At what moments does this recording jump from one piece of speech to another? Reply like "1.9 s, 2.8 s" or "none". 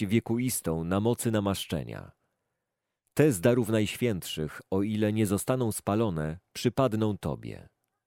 none